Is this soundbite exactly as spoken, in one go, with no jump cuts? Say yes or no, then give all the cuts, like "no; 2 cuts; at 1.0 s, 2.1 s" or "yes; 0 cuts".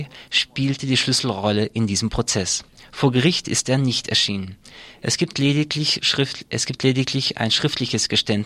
yes; 0 cuts